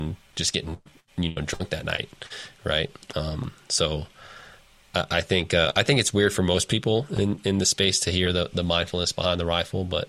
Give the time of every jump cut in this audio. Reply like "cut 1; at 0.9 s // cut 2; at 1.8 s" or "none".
none